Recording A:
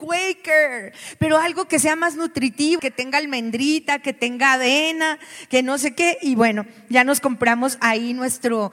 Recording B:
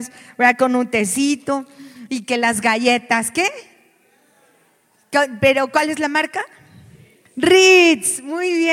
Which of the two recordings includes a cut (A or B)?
A